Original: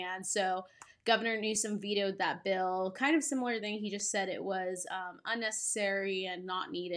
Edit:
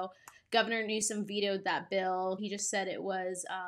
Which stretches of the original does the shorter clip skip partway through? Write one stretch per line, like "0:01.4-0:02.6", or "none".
0:02.9-0:03.8